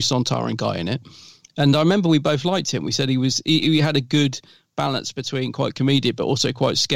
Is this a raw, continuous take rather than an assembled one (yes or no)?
no